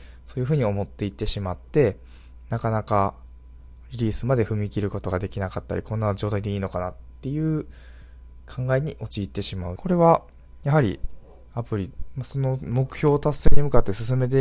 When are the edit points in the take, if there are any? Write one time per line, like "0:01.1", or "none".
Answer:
0:09.8
0:12.1